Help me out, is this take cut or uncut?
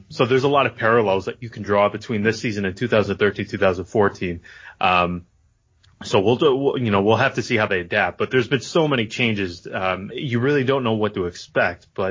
cut